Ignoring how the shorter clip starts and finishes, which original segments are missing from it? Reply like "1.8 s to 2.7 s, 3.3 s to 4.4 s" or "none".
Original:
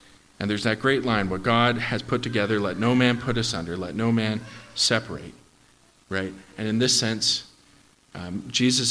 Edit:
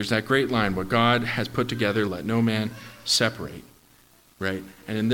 2.6 s to 3.8 s